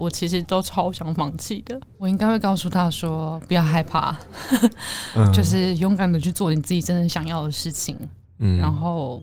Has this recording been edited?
yes; 1 cut; at 1.9 s

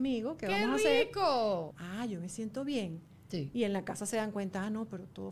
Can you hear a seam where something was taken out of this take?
yes; 1 cut; at 1.7 s

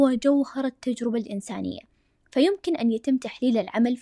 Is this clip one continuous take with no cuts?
yes; 0 cuts

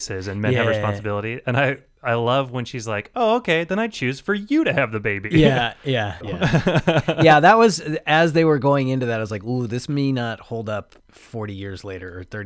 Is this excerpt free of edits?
no; 2 cuts; at 6.2 s, 11.0 s

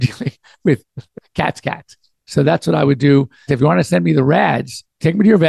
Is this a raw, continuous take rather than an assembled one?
no; 2 cuts; at 2.1 s, 3.5 s

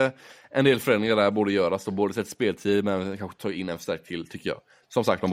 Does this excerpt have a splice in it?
no; 0 cuts

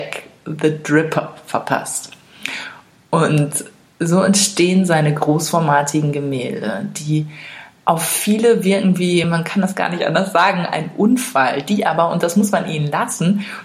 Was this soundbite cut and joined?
no; 0 cuts

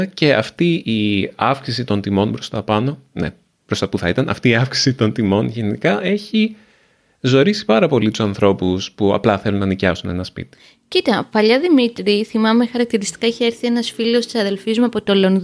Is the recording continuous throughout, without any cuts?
yes; 0 cuts

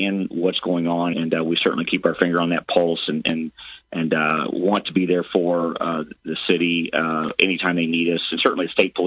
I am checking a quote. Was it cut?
yes; 1 cut; at 1.1 s

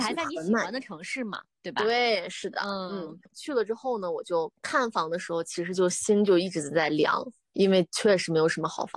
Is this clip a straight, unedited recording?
yes; 0 cuts

